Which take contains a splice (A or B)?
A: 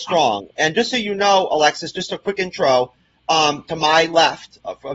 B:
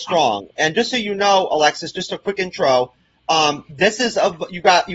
A